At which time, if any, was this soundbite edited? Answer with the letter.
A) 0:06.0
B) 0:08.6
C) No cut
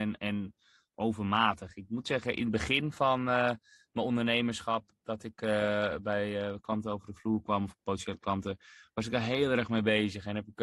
C